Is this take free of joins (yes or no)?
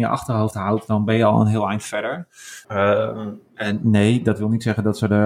no